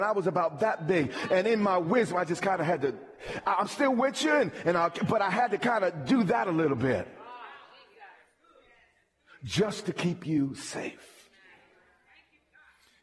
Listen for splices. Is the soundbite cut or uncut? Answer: uncut